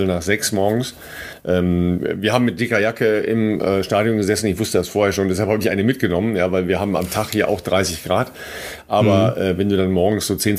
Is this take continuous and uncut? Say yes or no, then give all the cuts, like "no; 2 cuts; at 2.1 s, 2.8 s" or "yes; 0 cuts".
yes; 0 cuts